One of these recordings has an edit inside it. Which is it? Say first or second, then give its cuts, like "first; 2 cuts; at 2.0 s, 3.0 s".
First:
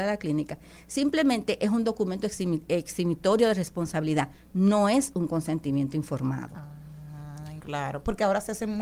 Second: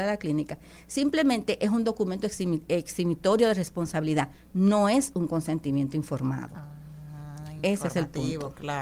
first; 1 cut; at 7.6 s